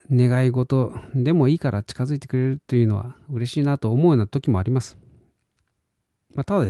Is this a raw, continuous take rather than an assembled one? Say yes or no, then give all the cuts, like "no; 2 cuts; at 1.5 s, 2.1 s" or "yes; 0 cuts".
yes; 0 cuts